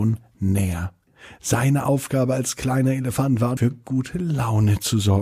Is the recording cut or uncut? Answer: uncut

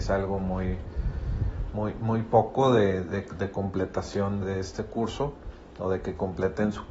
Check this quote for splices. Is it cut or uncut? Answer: cut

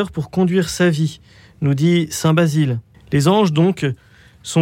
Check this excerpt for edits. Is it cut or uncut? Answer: cut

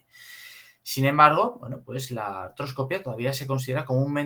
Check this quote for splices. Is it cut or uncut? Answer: uncut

